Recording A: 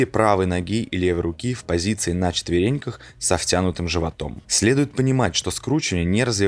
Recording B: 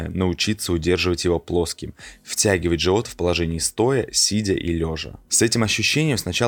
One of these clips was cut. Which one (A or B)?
A